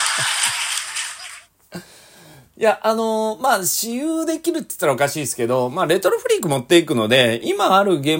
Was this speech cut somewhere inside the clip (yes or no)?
no